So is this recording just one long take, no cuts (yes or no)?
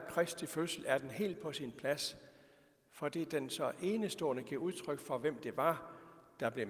yes